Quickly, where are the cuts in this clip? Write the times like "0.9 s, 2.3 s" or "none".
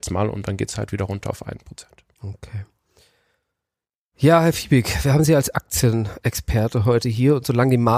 none